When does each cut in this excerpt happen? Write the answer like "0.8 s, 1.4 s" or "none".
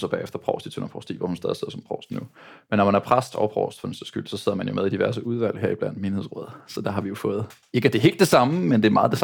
none

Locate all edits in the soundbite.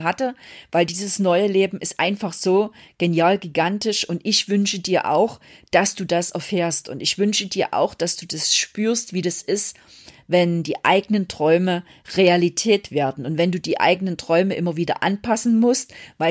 none

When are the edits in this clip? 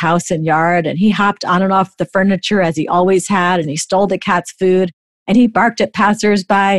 3.6 s

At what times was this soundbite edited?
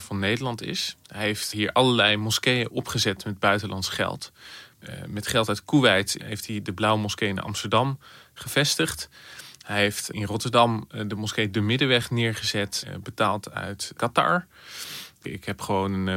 10.1 s, 15.2 s

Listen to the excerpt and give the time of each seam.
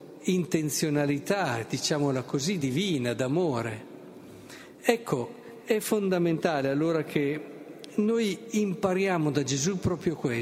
none

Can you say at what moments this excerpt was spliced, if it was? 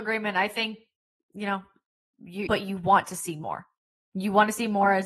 2.5 s

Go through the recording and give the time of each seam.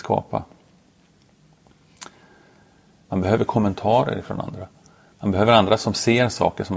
3.0 s

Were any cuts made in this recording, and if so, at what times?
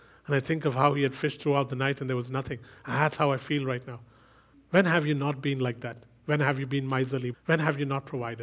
4.5 s, 7.3 s

